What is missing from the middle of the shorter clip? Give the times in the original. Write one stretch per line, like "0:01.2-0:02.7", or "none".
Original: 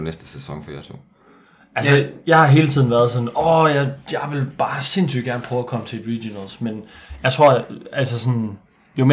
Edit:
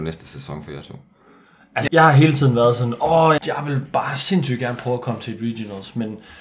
0:01.9-0:02.2
0:03.7-0:04.0